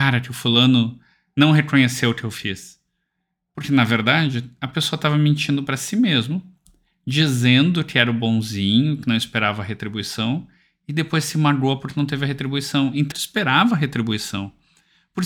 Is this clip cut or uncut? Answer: cut